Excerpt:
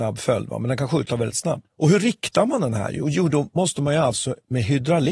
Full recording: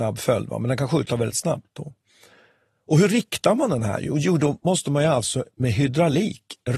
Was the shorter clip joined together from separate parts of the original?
yes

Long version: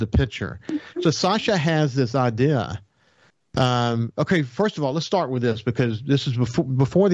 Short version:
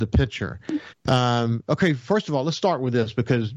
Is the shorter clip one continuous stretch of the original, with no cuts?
no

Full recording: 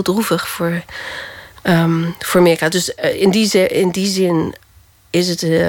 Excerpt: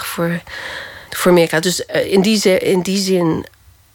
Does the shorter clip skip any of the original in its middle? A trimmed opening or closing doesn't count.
yes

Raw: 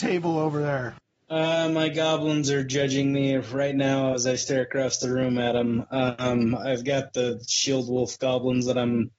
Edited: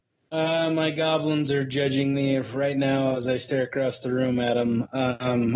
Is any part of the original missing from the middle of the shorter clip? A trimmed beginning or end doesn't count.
no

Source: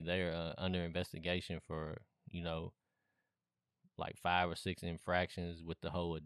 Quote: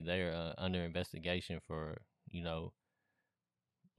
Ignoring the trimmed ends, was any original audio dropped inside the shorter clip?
no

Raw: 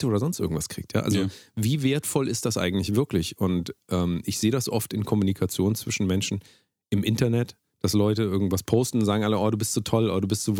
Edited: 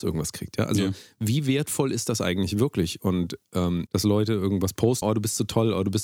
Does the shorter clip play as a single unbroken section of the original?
no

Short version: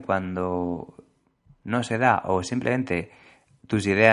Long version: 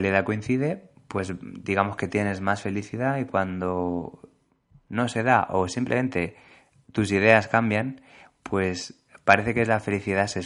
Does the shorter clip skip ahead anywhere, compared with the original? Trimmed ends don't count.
no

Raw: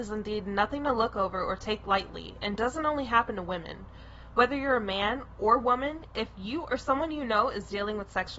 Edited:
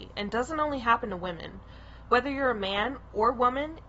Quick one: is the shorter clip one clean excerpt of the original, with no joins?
yes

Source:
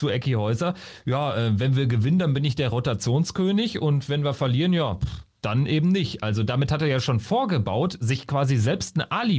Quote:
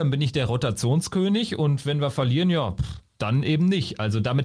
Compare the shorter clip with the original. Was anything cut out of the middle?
no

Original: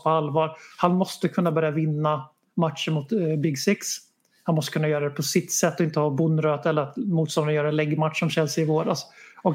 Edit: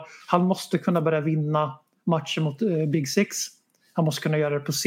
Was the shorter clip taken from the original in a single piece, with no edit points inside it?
yes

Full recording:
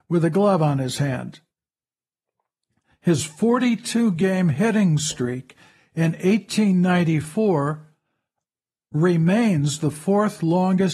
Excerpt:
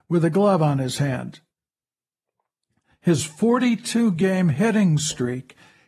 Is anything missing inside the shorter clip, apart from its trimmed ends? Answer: no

